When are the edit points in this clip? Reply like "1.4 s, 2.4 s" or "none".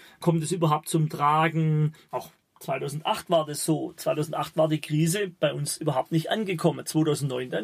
2.1 s